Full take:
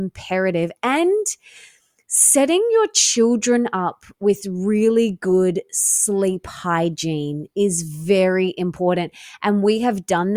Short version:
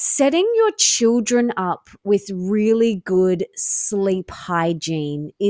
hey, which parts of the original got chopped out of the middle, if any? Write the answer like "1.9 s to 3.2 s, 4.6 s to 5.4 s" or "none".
none